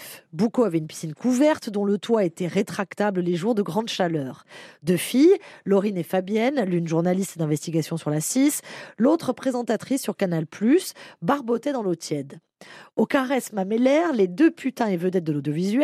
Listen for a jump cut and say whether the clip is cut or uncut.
uncut